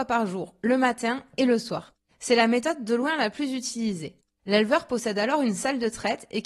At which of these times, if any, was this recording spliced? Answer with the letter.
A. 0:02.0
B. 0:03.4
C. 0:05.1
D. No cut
D